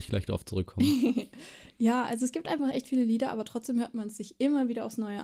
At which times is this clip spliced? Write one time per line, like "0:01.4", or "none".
none

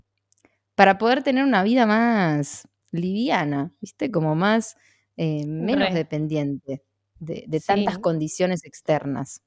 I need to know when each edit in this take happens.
none

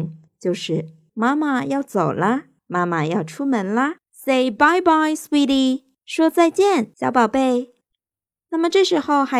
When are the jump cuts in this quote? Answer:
none

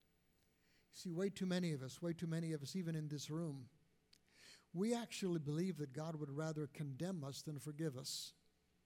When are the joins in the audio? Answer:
none

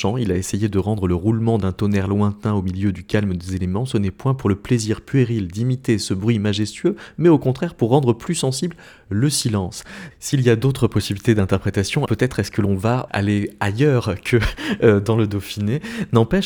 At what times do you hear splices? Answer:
0:10.1
0:12.1
0:13.1

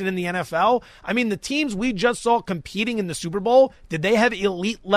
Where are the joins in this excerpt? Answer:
none

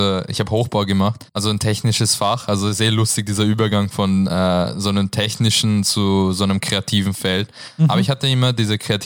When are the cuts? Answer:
0:01.3

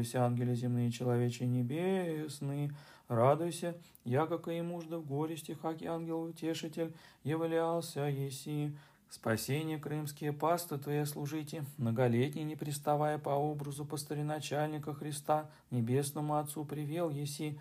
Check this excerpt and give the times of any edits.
0:08.9
0:15.6

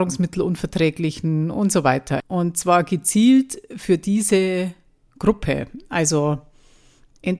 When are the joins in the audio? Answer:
0:02.2

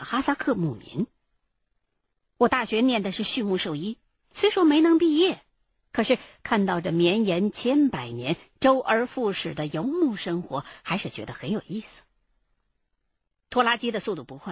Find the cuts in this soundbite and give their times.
none

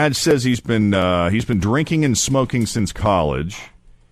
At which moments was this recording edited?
none

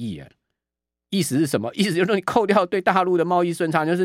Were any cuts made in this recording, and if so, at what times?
none

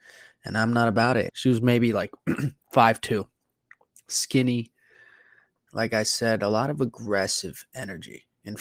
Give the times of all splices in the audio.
0:01.3
0:05.7

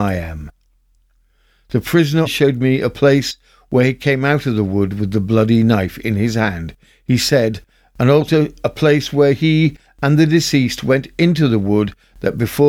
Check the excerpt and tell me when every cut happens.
0:02.3

